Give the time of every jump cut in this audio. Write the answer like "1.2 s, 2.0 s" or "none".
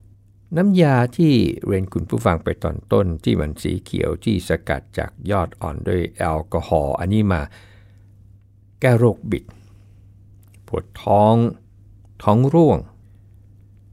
none

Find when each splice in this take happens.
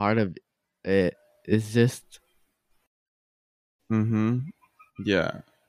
3.8 s

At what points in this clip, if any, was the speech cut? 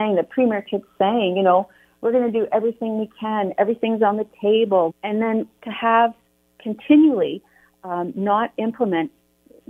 4.9 s

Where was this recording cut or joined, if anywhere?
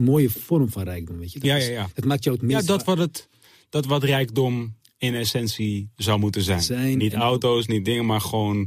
none

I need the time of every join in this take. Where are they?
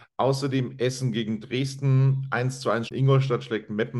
2.9 s

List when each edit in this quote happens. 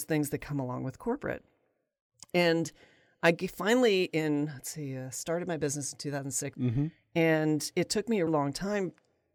6.5 s, 8.3 s

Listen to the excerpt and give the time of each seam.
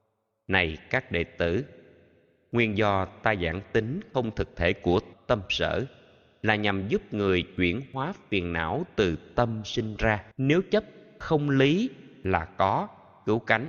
5.1 s, 10.3 s

